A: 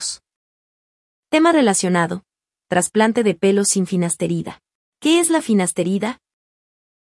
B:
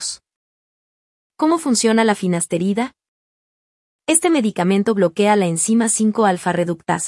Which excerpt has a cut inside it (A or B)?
B